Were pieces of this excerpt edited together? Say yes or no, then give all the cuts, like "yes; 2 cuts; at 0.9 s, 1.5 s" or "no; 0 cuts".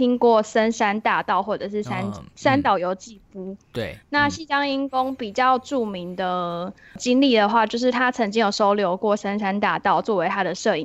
no; 0 cuts